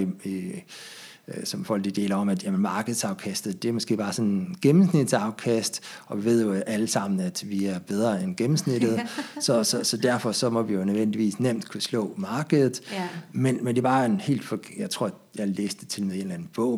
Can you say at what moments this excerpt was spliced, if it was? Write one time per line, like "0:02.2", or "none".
none